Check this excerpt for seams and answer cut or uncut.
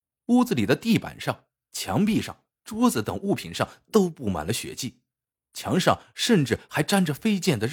uncut